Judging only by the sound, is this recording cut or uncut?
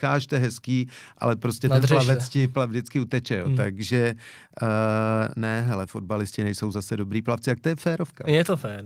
uncut